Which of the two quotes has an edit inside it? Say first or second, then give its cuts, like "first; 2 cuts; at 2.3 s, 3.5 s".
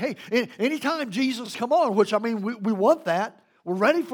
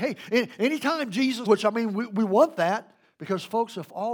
second; 2 cuts; at 1.5 s, 3.0 s